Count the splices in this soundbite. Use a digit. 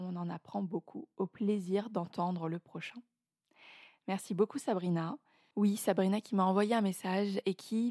0